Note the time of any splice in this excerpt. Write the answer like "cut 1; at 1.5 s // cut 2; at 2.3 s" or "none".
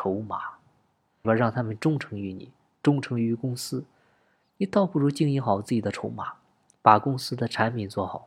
cut 1; at 1.2 s